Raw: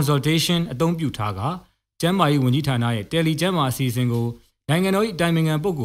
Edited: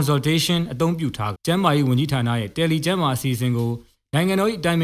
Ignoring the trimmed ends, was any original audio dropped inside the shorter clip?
yes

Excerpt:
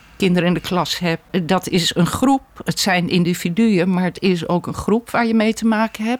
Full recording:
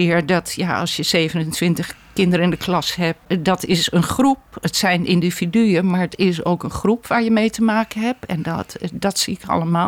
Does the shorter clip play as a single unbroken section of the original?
yes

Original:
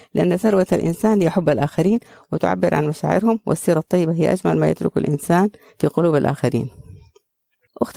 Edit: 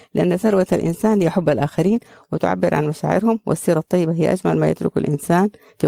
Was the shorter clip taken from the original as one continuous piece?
yes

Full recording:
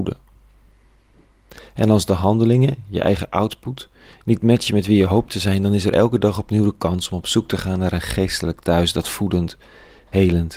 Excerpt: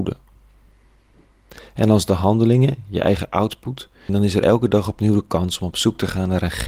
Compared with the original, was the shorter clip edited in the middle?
yes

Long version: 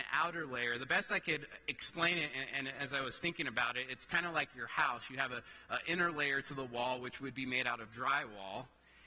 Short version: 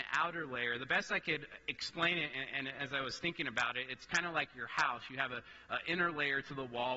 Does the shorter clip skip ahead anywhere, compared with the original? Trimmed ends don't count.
no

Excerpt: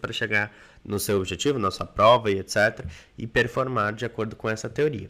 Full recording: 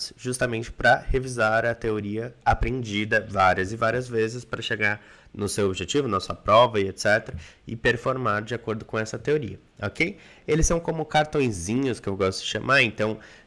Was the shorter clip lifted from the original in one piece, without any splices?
yes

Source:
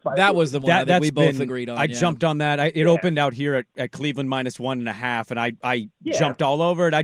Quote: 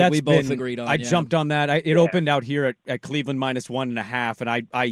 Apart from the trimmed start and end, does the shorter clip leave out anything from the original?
no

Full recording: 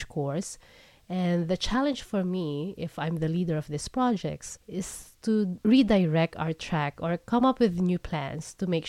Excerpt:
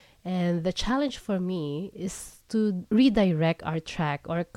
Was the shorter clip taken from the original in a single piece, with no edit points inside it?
no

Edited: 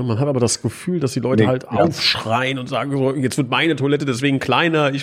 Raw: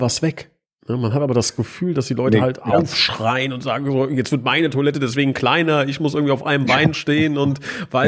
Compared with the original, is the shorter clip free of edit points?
yes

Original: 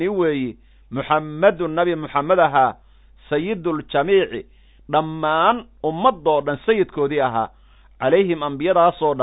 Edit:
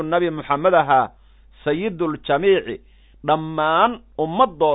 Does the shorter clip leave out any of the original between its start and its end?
no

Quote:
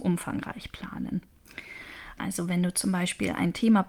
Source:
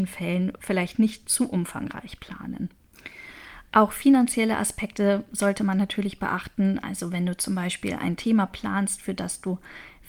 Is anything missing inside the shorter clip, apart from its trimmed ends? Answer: yes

